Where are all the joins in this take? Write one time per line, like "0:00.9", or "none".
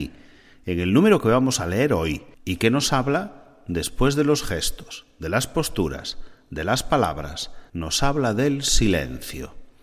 0:02.3
0:07.7